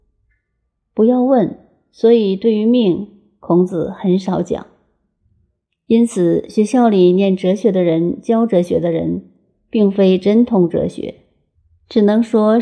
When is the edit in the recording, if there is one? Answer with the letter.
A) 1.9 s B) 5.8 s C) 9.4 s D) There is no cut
D